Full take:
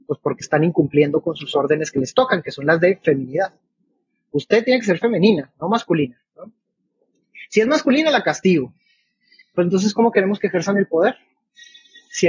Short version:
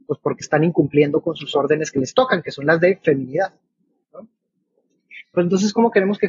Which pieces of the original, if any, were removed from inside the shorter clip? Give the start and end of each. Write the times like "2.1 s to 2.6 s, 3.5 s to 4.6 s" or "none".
4.0 s to 6.3 s, 7.5 s to 9.4 s